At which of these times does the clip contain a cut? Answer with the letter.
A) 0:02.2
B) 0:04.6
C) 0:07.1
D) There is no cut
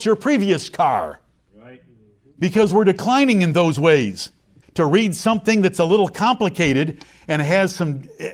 B